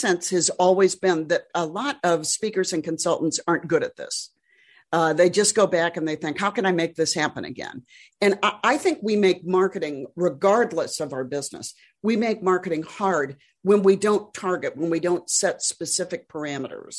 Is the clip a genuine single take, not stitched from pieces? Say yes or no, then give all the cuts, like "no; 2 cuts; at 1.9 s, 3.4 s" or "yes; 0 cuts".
yes; 0 cuts